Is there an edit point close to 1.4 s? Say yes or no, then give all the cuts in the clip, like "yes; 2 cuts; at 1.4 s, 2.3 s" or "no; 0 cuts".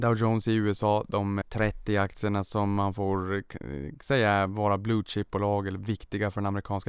yes; 1 cut; at 1.4 s